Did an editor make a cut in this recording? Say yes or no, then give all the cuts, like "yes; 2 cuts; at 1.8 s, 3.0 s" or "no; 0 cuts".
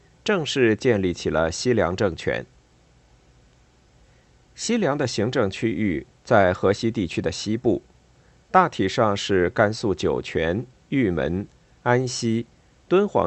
no; 0 cuts